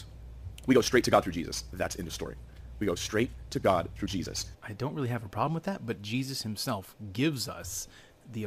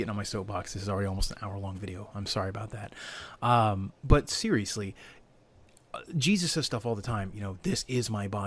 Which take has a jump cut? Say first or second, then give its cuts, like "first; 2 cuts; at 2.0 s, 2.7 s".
first; 1 cut; at 4.5 s